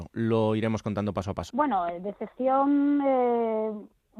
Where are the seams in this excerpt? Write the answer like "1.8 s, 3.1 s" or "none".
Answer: 1.5 s